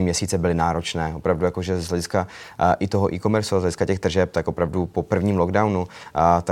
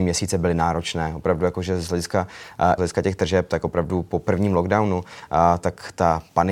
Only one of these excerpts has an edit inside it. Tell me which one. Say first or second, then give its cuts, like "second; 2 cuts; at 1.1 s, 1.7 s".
second; 1 cut; at 2.8 s